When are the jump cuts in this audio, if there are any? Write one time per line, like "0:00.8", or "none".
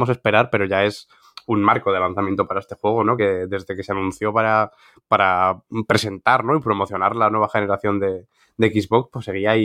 none